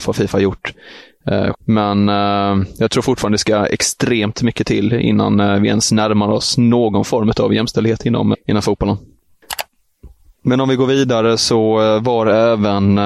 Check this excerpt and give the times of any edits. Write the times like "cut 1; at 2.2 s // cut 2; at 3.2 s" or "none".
cut 1; at 1.5 s // cut 2; at 8.3 s

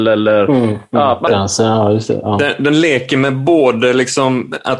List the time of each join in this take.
cut 1; at 1.3 s

